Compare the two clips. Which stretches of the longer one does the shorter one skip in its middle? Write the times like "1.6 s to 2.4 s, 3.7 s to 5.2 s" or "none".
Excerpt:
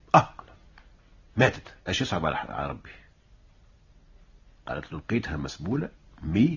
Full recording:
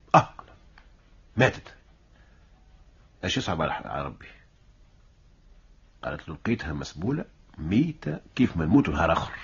1.8 s to 3.2 s

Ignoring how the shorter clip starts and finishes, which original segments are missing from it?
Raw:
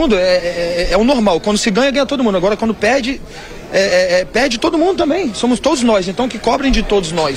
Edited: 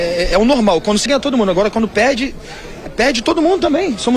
1.6 s to 1.9 s, 3.7 s to 4.2 s

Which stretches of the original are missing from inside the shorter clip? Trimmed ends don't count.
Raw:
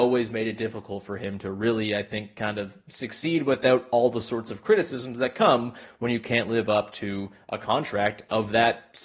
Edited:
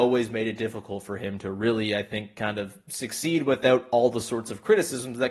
none

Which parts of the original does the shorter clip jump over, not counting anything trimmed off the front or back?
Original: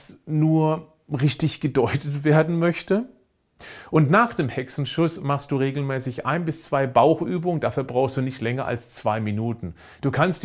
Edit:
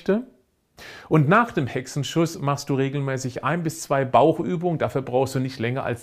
none

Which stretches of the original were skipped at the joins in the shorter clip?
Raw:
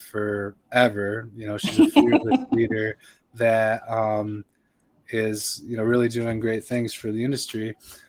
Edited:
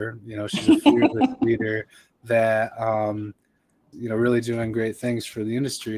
5.0 s to 5.6 s

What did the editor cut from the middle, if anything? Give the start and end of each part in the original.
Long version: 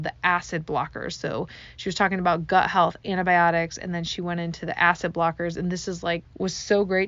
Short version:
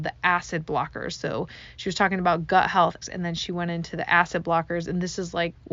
3.0 s to 3.7 s

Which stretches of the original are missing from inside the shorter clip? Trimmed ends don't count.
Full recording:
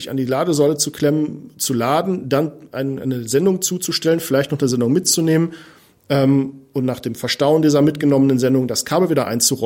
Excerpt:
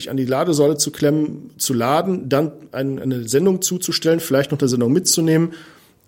none

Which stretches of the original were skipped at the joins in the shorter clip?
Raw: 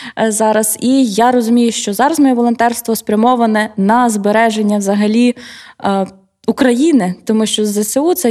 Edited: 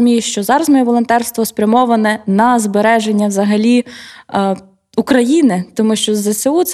none

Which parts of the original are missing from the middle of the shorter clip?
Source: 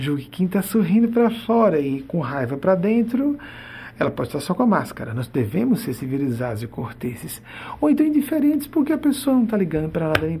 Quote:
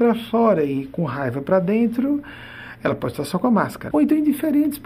5.1 s to 7.8 s

